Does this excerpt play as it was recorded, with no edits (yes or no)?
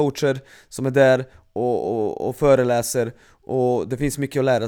yes